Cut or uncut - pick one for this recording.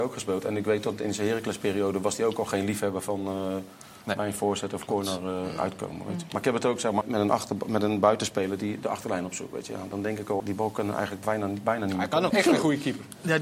cut